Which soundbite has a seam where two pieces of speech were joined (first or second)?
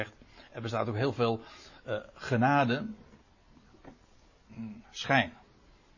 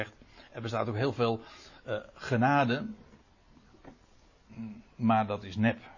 first